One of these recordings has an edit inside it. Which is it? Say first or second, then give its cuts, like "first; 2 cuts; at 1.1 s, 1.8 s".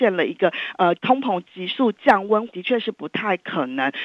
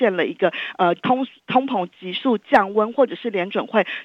first; 2 cuts; at 1.0 s, 2.5 s